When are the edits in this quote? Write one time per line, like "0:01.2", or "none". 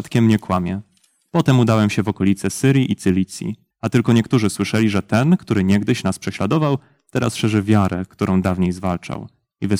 0:03.7